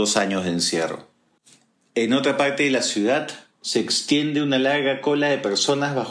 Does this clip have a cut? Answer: no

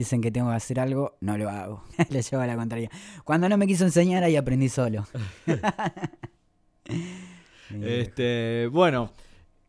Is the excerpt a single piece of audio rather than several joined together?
no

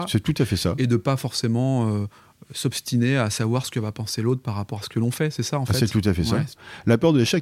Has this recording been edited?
yes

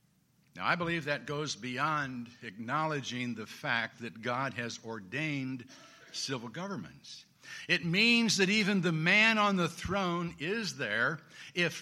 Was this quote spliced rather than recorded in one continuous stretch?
no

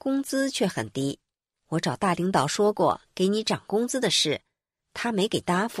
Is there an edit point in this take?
no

